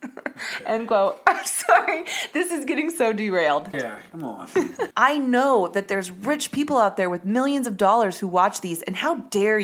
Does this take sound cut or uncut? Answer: cut